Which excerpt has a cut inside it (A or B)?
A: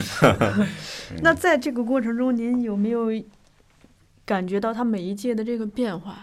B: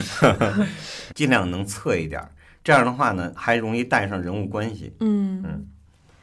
B